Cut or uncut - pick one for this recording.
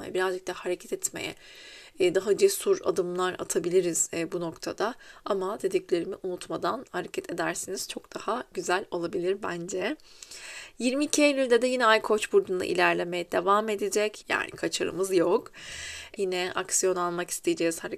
cut